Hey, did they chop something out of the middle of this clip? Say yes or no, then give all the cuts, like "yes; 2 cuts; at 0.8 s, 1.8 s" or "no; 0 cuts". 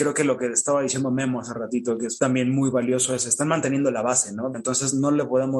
yes; 1 cut; at 4.5 s